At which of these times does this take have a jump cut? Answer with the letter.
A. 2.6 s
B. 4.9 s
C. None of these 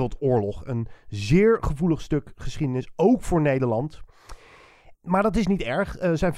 B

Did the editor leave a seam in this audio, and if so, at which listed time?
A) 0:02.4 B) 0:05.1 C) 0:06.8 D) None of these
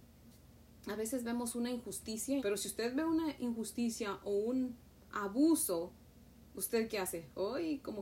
A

